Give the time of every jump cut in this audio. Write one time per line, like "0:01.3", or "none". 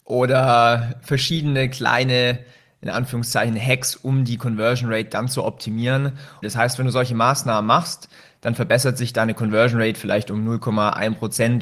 0:06.4